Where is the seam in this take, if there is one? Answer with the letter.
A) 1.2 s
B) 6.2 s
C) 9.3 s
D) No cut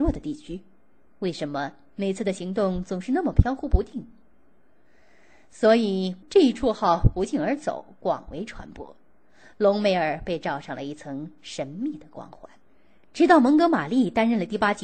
B